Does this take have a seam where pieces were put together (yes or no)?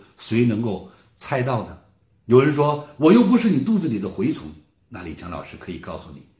no